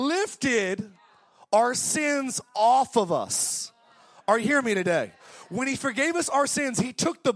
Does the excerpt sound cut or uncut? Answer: uncut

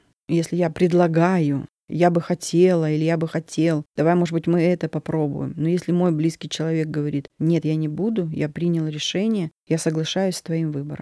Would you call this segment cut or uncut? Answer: uncut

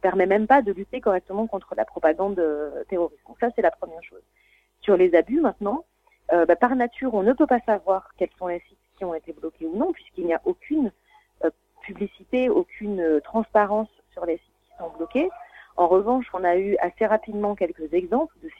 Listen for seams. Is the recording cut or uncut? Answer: uncut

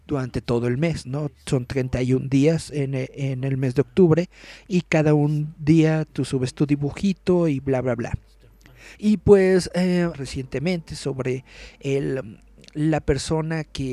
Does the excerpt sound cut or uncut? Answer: cut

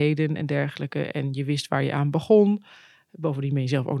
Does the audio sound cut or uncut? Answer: uncut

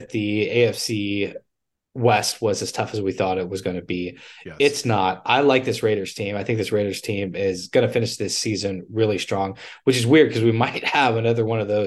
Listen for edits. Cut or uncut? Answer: uncut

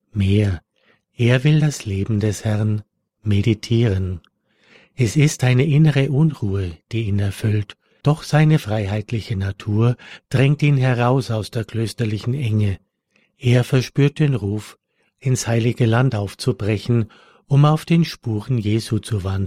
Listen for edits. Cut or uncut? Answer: cut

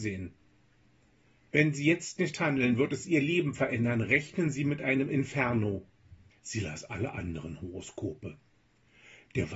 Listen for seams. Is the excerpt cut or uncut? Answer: cut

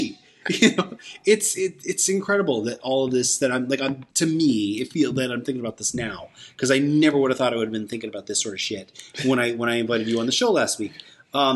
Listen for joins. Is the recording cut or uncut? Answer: cut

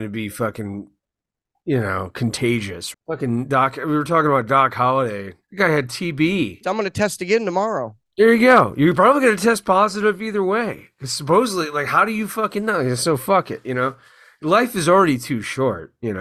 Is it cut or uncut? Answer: cut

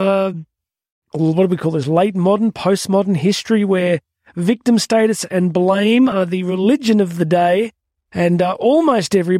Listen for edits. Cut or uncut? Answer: uncut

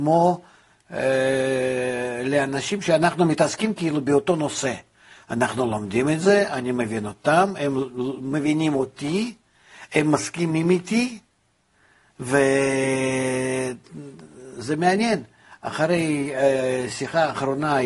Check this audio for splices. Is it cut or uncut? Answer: uncut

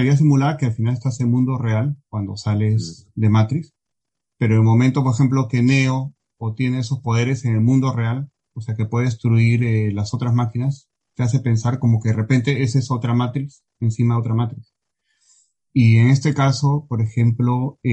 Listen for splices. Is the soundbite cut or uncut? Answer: uncut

